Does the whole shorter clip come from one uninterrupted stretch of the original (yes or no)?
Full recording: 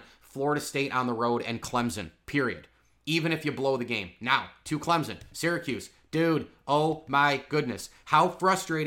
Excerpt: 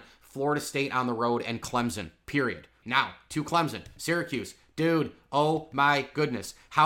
no